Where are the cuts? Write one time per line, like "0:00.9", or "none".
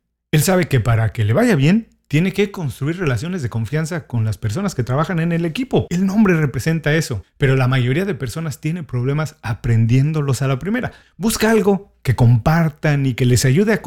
0:05.9
0:11.0